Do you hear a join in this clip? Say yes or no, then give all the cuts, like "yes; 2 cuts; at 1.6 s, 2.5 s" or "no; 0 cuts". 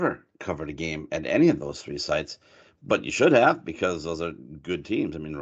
no; 0 cuts